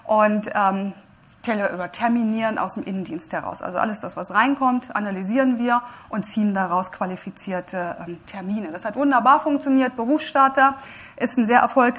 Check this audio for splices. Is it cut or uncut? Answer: uncut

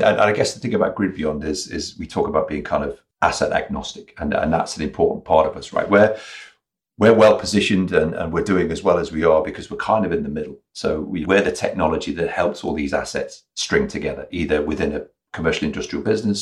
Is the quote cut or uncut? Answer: cut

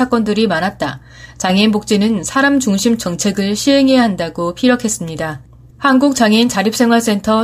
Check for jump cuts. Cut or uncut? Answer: cut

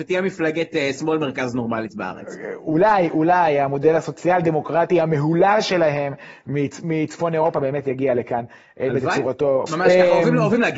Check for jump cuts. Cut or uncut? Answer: cut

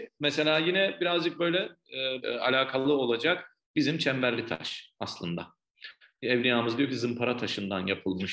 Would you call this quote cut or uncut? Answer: cut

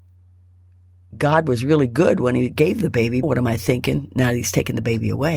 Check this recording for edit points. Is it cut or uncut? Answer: cut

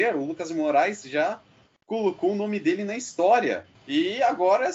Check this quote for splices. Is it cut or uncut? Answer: cut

